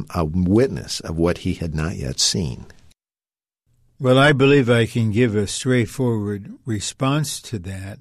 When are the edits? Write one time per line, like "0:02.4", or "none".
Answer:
none